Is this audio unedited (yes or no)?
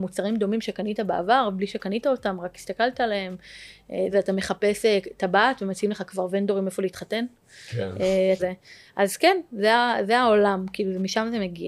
no